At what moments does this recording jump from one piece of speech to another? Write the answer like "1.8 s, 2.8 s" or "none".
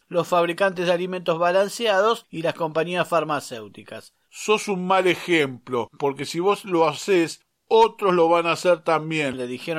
4.2 s